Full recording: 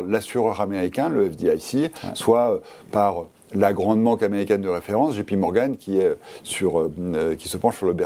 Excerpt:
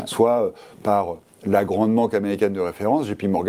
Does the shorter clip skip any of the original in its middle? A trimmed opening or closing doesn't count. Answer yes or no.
no